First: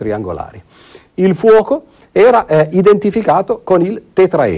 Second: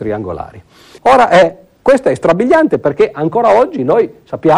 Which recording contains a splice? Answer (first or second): second